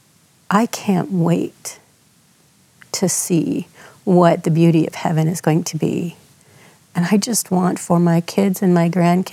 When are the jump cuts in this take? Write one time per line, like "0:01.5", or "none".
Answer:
0:06.9